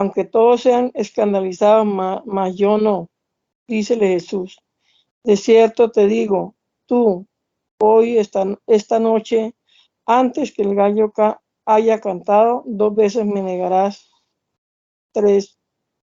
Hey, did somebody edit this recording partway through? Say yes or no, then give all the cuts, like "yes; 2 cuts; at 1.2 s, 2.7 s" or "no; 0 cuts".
no; 0 cuts